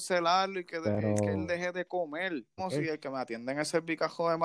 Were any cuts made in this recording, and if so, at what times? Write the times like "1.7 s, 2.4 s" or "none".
2.6 s